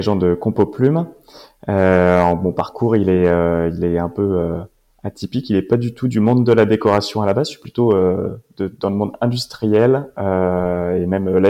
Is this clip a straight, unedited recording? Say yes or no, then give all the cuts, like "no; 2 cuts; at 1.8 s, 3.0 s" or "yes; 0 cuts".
yes; 0 cuts